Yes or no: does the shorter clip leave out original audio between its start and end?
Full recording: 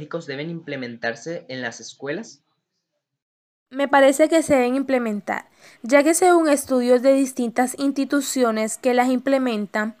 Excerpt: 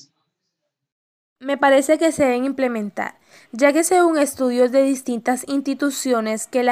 no